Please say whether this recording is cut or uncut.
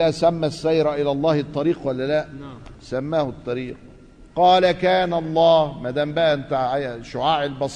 cut